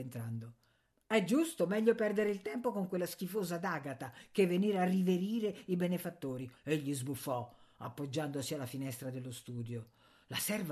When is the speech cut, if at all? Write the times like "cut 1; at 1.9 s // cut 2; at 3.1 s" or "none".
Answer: cut 1; at 6.5 s